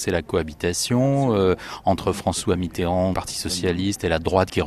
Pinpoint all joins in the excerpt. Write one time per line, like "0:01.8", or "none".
0:03.1